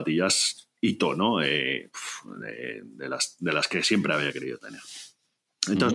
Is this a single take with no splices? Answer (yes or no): yes